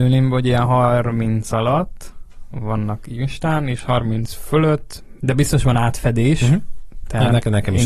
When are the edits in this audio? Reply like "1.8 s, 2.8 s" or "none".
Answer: 5.2 s